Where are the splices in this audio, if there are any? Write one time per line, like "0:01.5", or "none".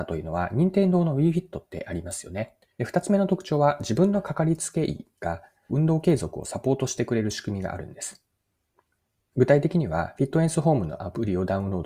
0:02.8
0:05.7